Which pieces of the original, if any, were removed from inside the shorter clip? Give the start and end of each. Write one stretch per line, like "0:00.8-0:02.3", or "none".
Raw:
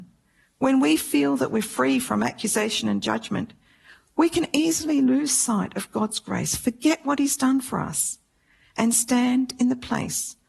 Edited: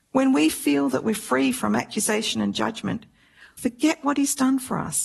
0:04.0-0:06.6